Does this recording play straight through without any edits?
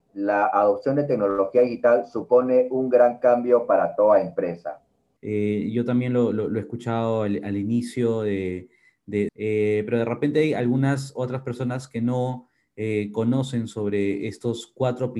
no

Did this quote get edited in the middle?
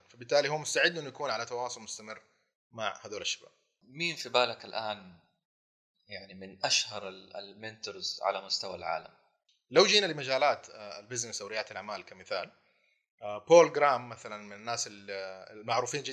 no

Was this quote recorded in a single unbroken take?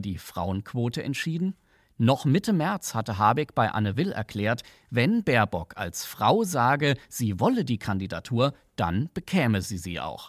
yes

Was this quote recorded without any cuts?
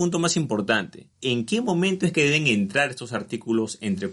no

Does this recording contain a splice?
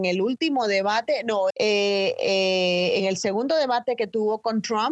yes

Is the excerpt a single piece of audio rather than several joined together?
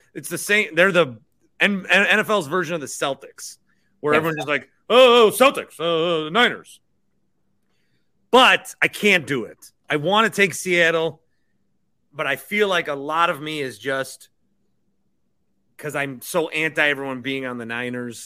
yes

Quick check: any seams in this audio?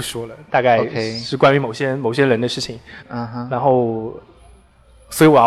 yes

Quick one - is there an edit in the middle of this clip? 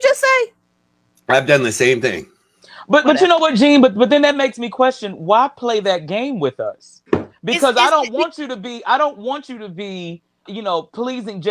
yes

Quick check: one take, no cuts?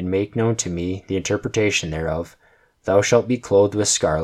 yes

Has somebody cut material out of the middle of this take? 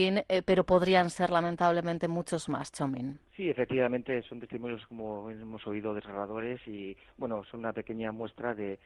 yes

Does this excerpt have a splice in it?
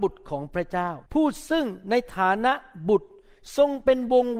yes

